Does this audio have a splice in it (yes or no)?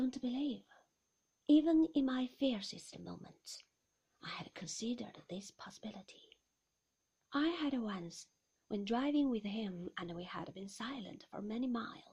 no